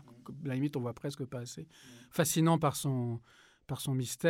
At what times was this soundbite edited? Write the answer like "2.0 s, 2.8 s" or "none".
none